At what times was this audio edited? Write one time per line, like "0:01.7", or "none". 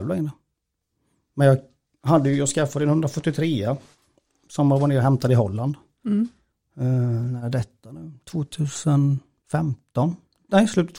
none